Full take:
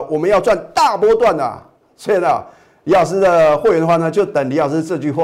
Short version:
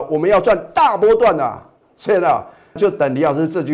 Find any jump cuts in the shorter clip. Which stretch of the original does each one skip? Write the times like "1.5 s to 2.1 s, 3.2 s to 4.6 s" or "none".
2.8 s to 4.1 s